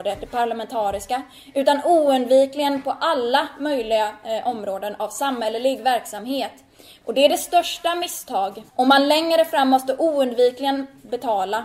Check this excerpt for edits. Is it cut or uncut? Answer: cut